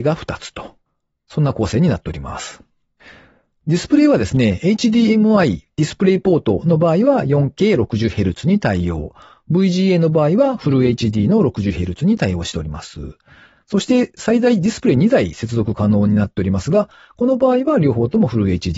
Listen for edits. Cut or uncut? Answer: uncut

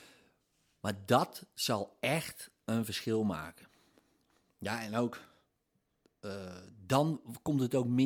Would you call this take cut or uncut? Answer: uncut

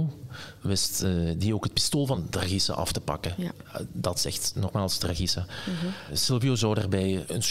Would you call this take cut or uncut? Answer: uncut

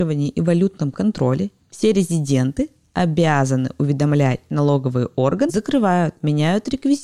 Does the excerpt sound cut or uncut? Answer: cut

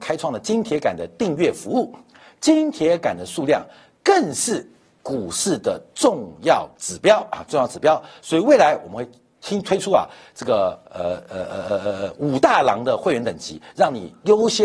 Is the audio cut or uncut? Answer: uncut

